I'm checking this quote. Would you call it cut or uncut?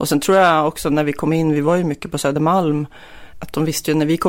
cut